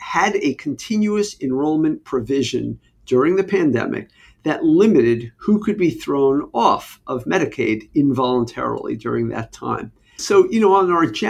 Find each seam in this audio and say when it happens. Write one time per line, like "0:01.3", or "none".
0:10.2

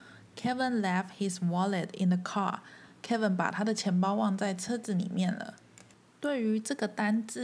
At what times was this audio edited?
none

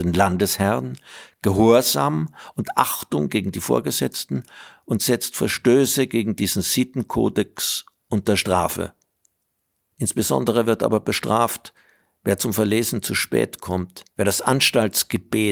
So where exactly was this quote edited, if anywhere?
0:14.1

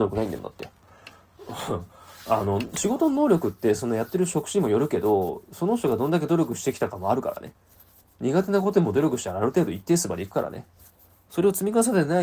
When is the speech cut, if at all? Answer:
none

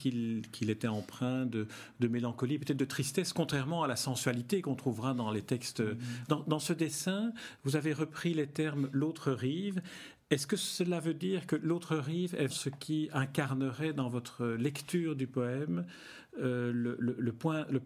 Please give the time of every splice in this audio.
0:06.3
0:12.5

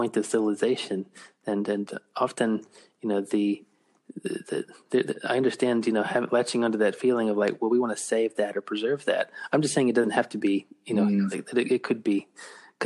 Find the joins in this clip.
0:11.3

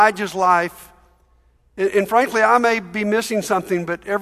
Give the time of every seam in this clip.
none

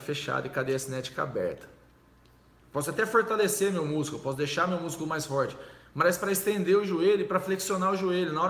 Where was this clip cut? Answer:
0:02.6

